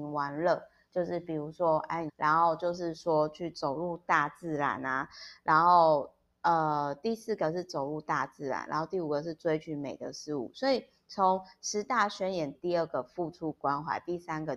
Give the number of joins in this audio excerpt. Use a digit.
2